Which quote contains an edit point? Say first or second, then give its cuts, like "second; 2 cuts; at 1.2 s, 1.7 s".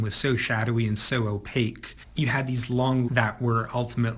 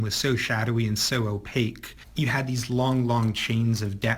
first; 1 cut; at 3.1 s